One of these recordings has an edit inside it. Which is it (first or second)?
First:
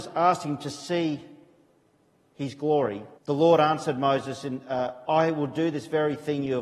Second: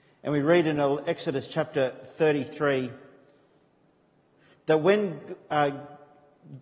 first